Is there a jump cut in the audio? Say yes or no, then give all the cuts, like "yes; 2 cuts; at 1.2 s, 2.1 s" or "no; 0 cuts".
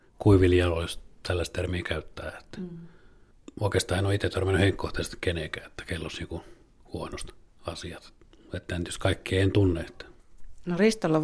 no; 0 cuts